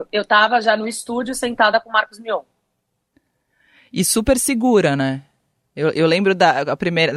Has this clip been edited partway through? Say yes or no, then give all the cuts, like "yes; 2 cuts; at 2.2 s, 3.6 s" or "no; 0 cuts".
no; 0 cuts